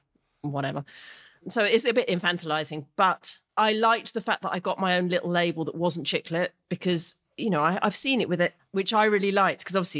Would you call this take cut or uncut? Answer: cut